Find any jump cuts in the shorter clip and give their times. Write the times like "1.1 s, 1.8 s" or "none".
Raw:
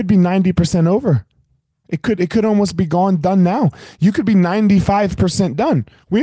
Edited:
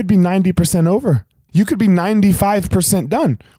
1.5 s